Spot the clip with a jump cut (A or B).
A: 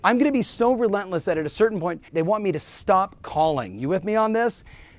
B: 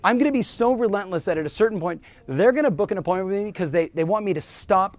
A